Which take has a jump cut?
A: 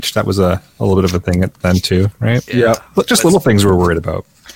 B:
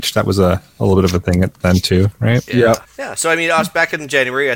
B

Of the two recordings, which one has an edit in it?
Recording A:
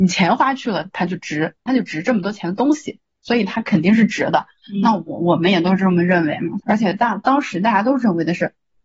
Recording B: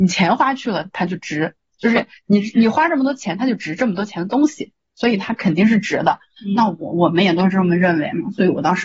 A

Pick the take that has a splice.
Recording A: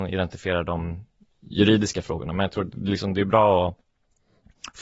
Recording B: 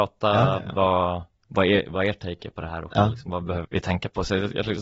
B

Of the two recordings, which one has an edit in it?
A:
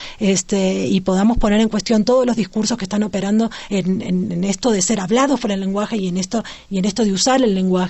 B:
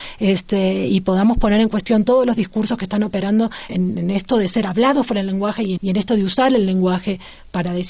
B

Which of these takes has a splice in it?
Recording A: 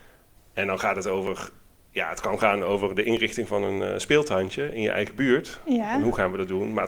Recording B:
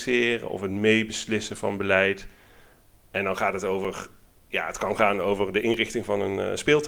A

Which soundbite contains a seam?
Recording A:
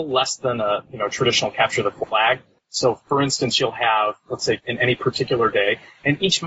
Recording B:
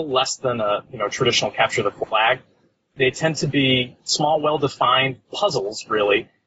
A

